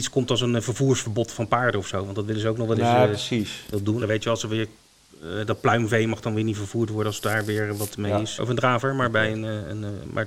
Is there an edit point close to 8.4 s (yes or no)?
yes